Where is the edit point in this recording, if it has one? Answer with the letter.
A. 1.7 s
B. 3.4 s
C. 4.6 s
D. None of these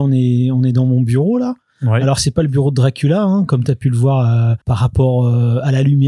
C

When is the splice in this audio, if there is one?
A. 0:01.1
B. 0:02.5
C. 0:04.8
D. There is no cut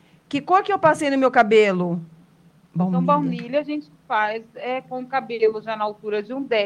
B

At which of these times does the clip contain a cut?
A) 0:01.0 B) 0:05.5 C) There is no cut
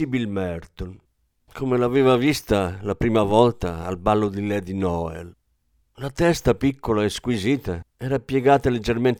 C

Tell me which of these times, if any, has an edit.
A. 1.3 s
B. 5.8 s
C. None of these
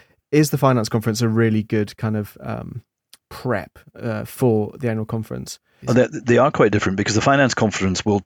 B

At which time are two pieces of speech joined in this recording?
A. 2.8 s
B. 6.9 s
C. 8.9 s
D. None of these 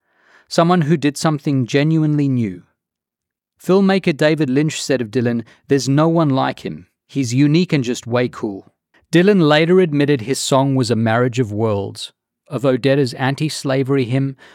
C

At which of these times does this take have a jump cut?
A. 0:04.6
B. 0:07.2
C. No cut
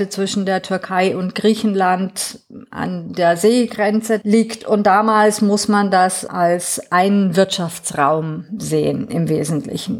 C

